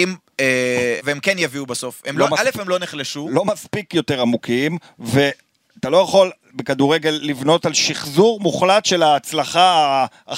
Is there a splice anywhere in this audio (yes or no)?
yes